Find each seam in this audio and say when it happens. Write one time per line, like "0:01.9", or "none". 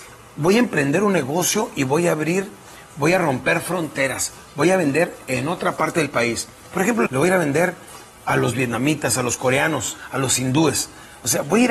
0:07.1